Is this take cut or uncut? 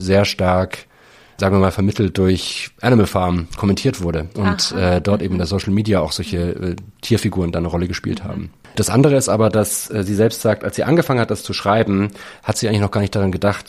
uncut